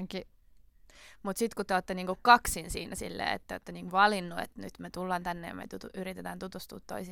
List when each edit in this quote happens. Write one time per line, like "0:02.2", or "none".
none